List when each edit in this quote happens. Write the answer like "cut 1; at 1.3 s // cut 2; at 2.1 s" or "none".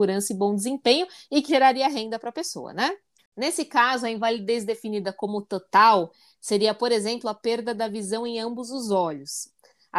cut 1; at 1.5 s // cut 2; at 3.2 s